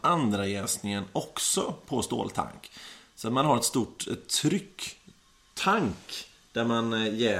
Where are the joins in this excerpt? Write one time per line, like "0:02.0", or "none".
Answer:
none